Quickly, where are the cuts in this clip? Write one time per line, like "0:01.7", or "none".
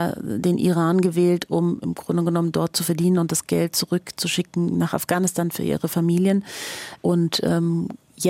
0:07.0